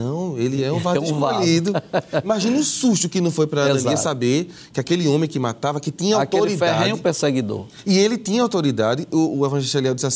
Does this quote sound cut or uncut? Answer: uncut